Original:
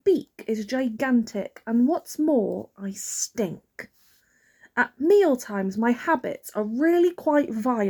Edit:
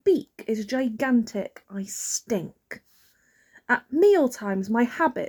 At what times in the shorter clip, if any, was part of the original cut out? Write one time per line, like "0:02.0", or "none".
0:01.6